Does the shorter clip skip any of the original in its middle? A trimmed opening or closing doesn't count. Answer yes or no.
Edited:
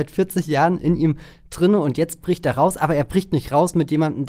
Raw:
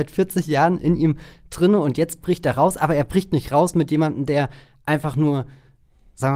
no